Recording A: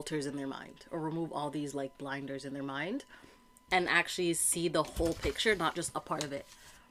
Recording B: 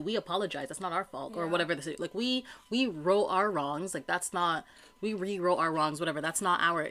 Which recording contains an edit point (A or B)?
B